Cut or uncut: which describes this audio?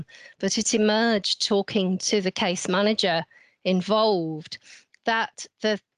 uncut